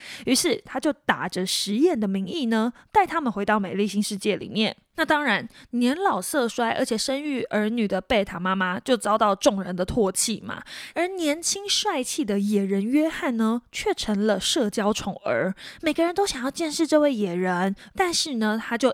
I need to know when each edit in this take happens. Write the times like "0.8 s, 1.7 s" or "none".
10.9 s, 17.9 s